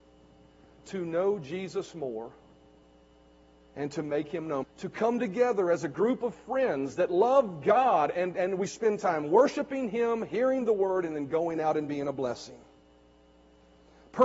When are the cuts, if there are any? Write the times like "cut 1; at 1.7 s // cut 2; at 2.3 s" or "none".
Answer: cut 1; at 4.6 s